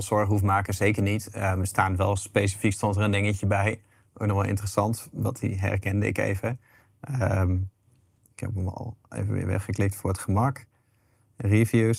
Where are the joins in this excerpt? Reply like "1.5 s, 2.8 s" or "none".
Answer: none